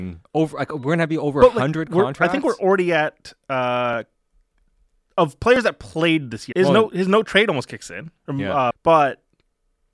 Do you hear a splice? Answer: yes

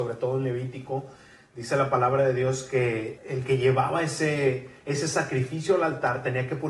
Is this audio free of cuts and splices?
no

